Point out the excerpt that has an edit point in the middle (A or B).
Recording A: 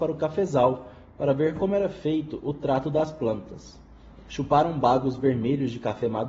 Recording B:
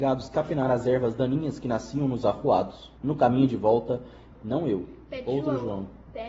B